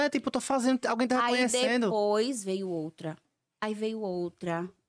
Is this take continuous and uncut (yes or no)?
yes